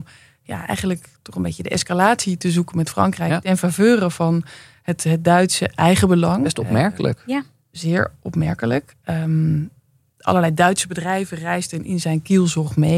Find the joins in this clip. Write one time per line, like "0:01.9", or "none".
none